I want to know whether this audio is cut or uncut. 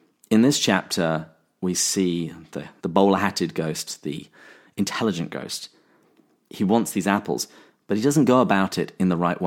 cut